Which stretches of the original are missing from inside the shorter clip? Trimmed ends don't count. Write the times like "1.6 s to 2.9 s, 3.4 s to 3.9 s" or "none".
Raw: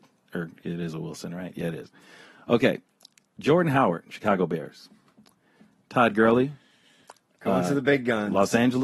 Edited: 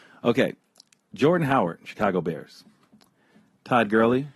none